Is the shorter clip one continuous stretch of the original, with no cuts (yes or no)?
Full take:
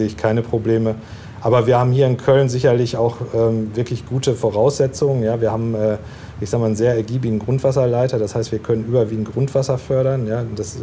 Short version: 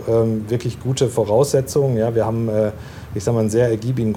yes